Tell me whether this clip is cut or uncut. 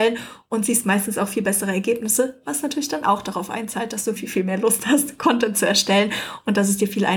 cut